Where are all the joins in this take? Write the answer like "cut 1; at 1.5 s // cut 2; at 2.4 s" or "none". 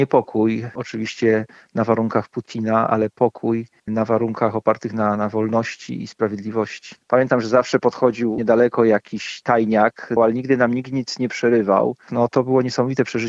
cut 1; at 7.0 s // cut 2; at 10.2 s // cut 3; at 12.1 s

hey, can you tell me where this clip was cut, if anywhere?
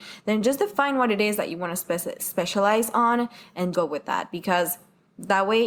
cut 1; at 2.2 s // cut 2; at 3.7 s

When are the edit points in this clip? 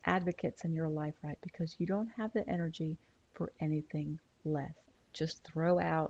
cut 1; at 1.4 s // cut 2; at 4.9 s

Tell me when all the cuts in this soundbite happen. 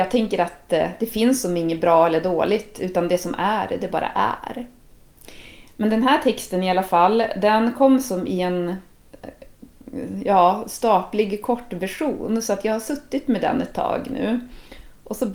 none

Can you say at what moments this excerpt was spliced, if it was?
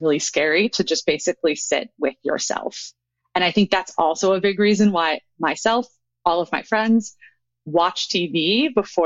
none

